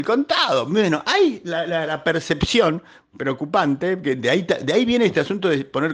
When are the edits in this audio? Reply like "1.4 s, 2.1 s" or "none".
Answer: none